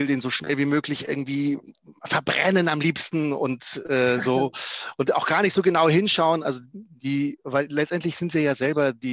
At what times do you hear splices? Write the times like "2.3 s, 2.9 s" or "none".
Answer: none